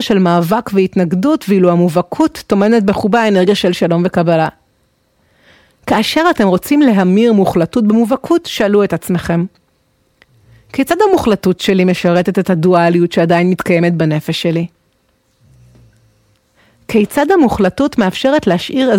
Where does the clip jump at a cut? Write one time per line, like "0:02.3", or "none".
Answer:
none